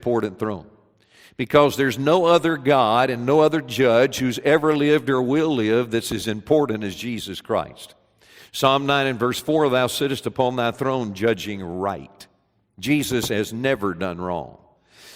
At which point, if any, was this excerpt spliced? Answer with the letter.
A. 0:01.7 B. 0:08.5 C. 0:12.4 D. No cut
D